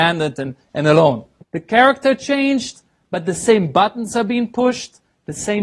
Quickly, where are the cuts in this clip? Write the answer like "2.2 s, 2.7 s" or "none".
1.4 s